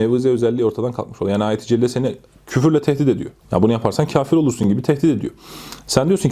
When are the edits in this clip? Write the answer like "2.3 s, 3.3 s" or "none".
3.4 s

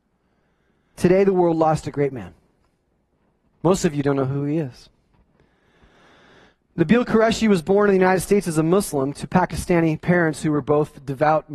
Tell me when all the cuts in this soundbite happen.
0.9 s, 3.6 s

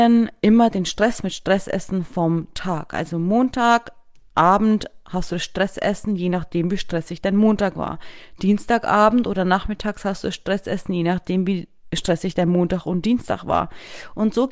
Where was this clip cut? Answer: none

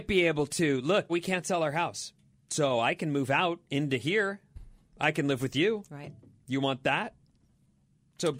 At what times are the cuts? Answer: 1.1 s

